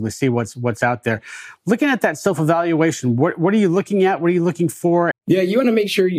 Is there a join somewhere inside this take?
yes; 1 cut; at 5.1 s

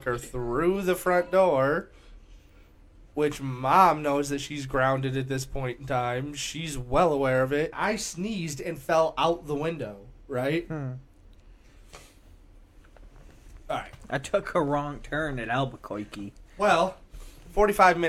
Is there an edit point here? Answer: yes; 1 cut; at 7.7 s

